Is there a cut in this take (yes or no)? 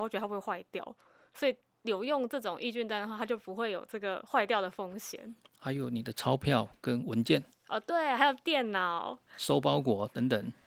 no